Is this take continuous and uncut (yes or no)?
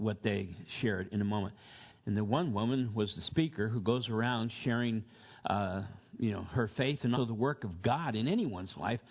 no